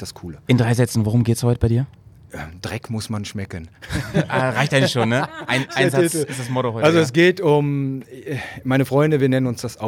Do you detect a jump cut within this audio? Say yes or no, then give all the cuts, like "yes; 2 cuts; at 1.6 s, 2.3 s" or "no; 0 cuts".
no; 0 cuts